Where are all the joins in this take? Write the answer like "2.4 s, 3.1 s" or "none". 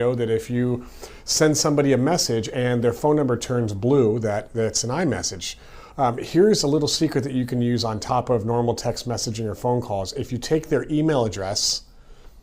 none

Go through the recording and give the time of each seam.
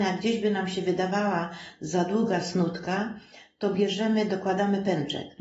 none

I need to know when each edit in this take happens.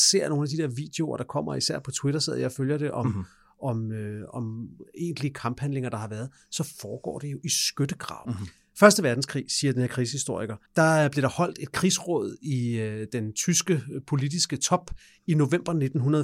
8.2 s, 10.7 s

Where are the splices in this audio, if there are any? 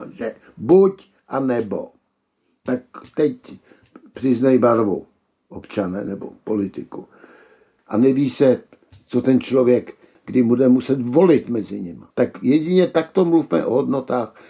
7.8 s, 10.2 s, 12.1 s

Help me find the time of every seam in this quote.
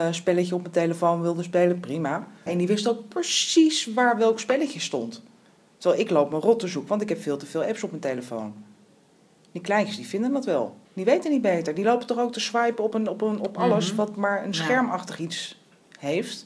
2.5 s, 10.8 s

